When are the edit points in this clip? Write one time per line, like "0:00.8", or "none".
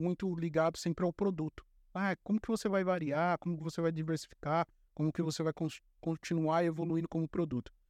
none